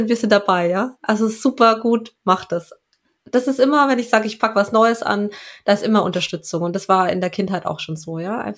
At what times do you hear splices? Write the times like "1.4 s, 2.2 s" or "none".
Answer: none